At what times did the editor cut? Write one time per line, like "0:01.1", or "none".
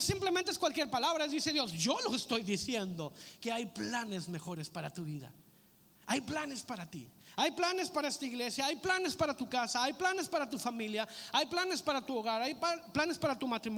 none